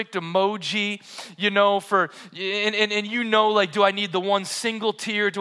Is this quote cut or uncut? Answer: uncut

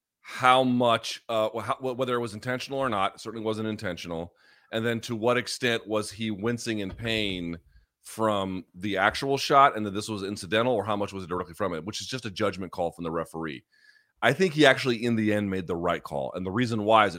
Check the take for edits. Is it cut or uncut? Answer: uncut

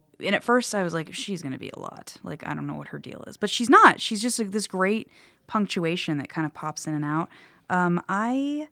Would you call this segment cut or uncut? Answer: uncut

